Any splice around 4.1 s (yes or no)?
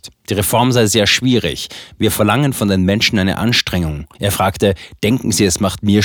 yes